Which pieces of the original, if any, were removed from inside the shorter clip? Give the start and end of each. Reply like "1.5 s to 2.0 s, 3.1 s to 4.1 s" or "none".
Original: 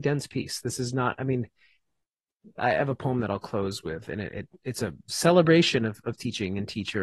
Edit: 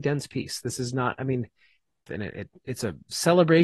2.1 s to 4.0 s